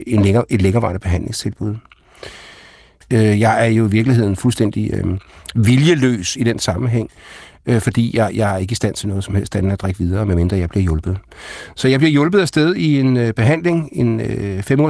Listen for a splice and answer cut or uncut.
uncut